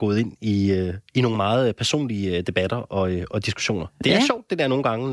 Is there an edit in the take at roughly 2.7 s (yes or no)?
no